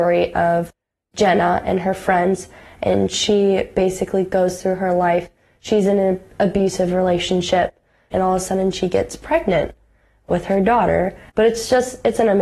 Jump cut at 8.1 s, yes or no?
yes